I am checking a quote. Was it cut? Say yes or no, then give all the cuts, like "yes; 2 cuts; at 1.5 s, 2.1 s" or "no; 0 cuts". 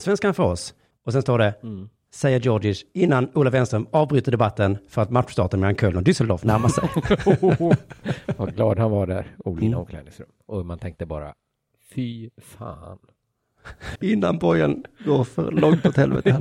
yes; 3 cuts; at 0.9 s, 9.6 s, 14.0 s